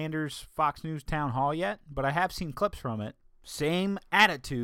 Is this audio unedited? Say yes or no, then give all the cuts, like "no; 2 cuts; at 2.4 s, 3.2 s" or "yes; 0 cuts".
no; 1 cut; at 3.2 s